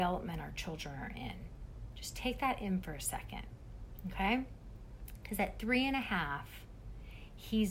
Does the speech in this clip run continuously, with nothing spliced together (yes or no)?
yes